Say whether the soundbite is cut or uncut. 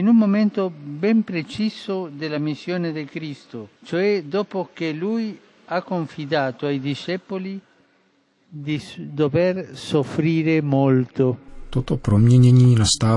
cut